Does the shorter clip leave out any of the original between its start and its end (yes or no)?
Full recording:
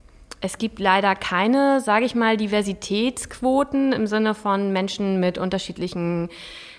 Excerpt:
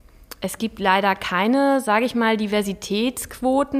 no